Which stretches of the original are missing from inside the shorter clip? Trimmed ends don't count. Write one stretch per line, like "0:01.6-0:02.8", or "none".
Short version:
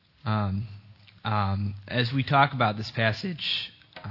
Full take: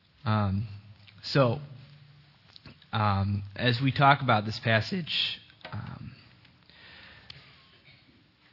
0:01.2-0:02.9